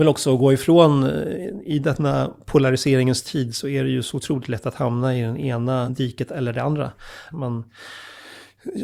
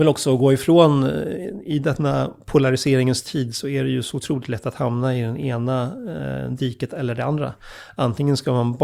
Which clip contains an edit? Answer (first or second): first